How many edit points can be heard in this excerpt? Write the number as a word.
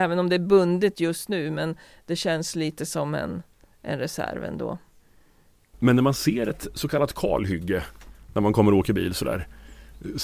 zero